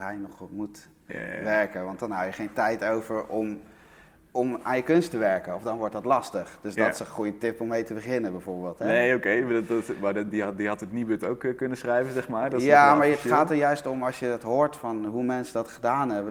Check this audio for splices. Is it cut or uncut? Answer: uncut